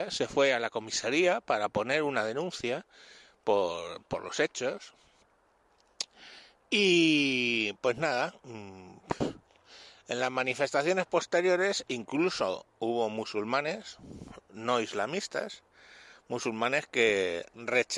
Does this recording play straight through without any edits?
yes; 0 cuts

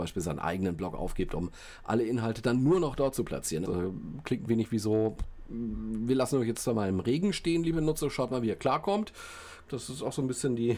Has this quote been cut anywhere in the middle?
yes; 2 cuts; at 3.6 s, 9.7 s

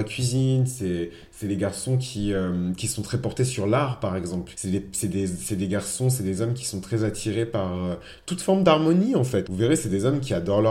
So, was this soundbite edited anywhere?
yes; 2 cuts; at 4.5 s, 9.5 s

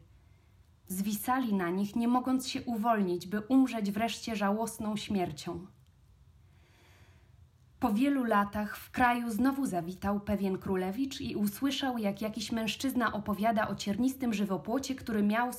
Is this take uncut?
yes; 0 cuts

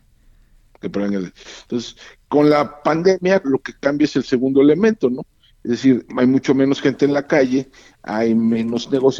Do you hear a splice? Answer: yes; 2 cuts; at 3.4 s, 6.1 s

